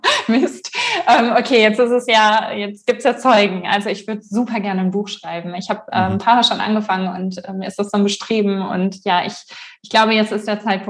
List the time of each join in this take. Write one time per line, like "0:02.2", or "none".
none